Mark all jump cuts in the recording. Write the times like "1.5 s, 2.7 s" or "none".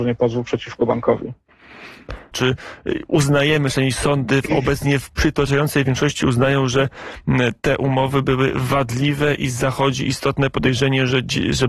2.3 s

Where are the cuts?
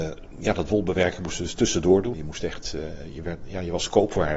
2.1 s

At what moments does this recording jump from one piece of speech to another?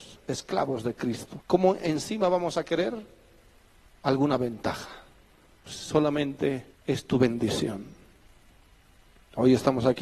1.4 s, 5.7 s, 6.7 s

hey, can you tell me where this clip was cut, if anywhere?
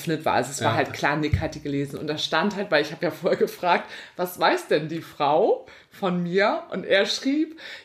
none

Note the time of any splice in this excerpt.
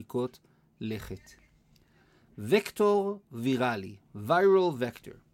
none

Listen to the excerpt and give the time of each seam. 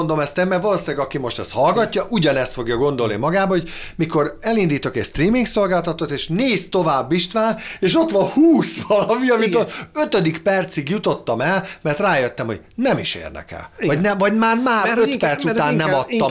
none

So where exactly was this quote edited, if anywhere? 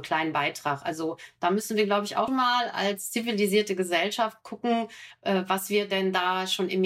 2.3 s

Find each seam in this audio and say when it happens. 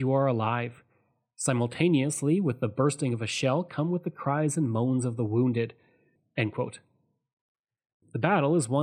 6.2 s

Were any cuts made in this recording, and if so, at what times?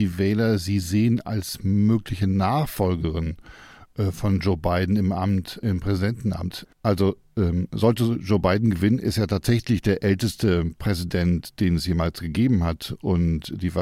6.7 s

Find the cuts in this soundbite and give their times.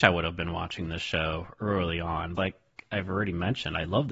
2.4 s

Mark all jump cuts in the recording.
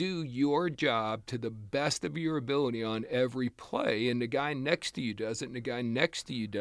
none

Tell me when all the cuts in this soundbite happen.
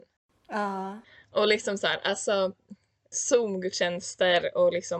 3.1 s

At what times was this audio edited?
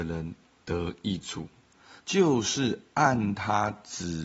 2.0 s

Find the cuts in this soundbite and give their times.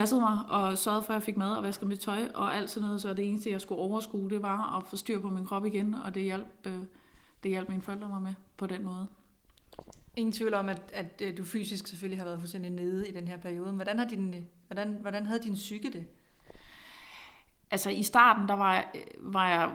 none

